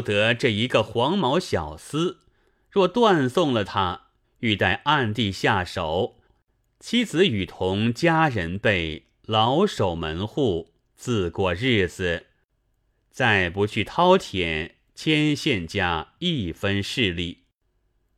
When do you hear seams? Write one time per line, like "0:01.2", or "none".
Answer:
0:04.2
0:06.3